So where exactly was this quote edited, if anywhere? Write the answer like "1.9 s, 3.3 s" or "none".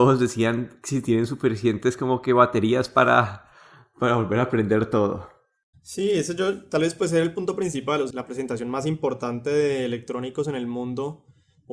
5.7 s, 8.1 s